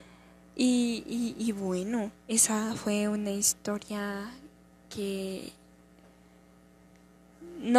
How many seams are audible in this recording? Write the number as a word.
zero